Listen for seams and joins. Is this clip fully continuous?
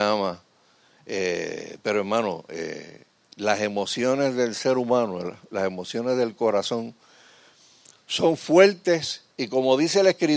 no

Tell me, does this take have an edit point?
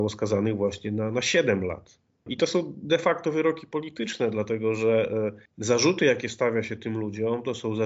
yes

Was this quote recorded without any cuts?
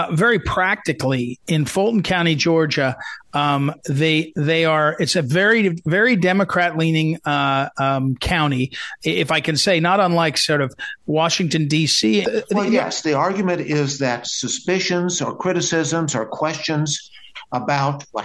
no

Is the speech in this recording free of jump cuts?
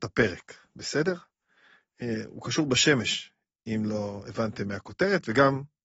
yes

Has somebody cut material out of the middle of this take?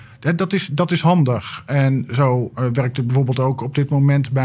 no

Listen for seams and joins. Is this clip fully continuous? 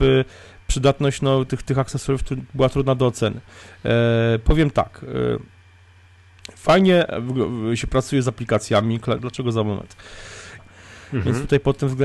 no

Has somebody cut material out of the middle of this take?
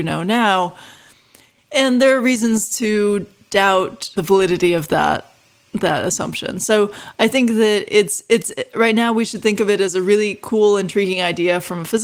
no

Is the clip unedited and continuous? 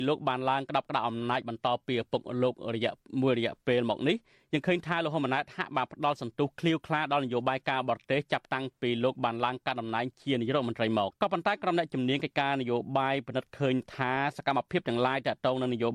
no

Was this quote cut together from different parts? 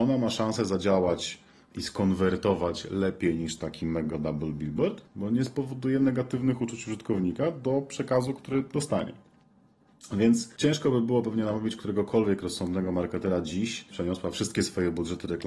yes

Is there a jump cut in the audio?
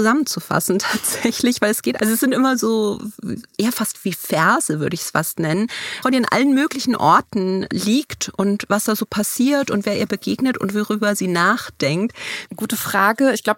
yes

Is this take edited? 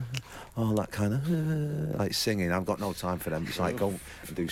no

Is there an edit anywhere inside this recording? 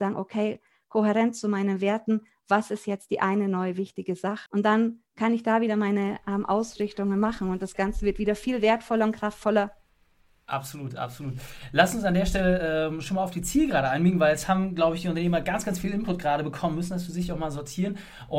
yes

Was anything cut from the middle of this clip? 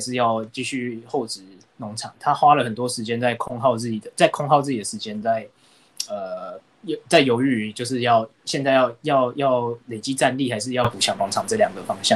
no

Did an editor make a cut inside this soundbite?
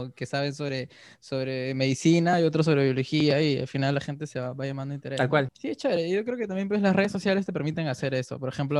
yes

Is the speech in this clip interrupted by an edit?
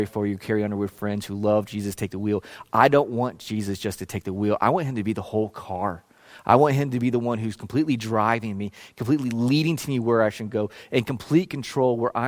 no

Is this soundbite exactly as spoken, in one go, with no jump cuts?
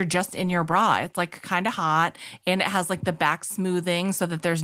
yes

